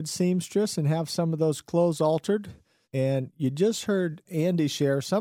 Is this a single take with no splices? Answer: no; 2 cuts; at 2.8 s, 4.2 s

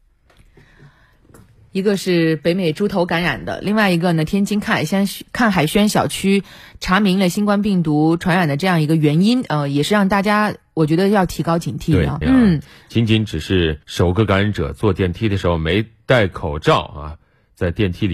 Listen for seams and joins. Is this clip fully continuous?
no; 2 cuts; at 12.2 s, 13.8 s

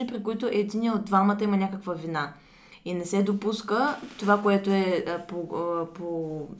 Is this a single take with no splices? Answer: yes; 0 cuts

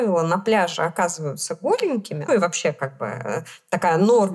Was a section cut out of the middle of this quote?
yes; 1 cut; at 2.3 s

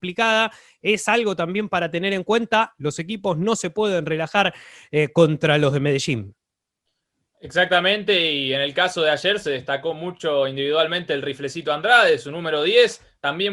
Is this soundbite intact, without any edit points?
yes; 0 cuts

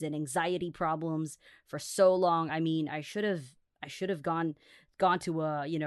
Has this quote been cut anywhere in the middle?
no; 0 cuts

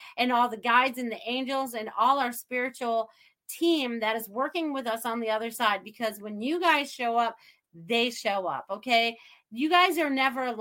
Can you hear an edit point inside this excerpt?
no; 0 cuts

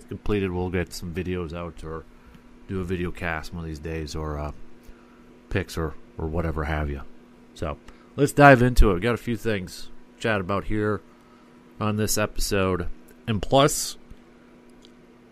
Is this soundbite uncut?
no; 1 cut; at 0.9 s

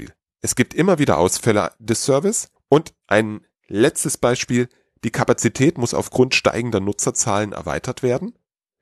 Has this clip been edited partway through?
yes; 1 cut; at 2.6 s

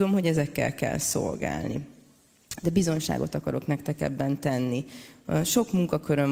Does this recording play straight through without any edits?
yes; 0 cuts

